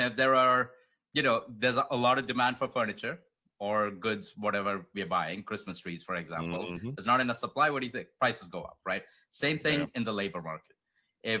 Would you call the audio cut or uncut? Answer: uncut